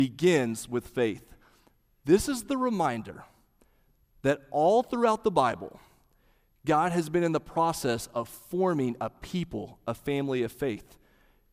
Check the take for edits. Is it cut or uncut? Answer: uncut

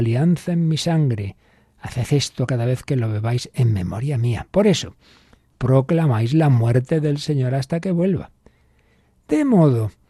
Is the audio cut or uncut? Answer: cut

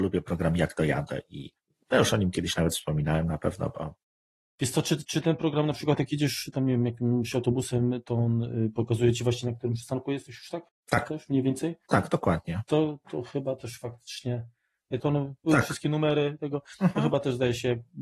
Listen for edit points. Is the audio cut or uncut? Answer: cut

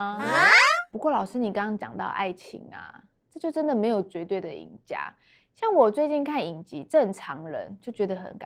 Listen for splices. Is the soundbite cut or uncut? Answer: uncut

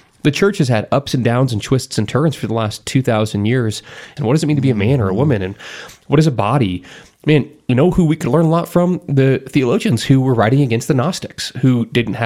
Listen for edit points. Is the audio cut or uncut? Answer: cut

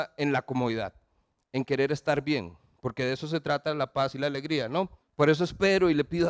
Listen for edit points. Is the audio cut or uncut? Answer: cut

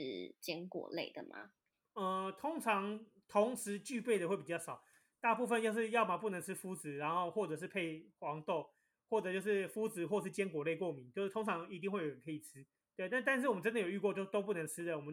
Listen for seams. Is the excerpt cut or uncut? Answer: uncut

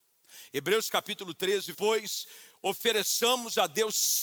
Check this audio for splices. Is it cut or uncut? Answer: cut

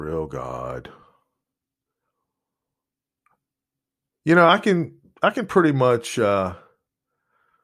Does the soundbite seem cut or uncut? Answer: uncut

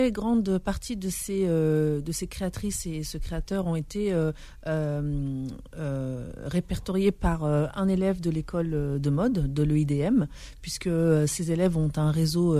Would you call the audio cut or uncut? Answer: uncut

